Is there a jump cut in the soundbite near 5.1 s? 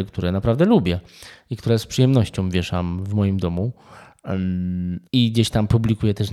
yes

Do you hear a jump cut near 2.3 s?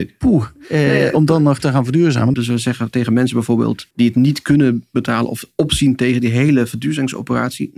yes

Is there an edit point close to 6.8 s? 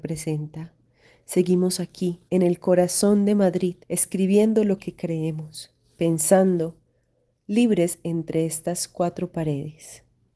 no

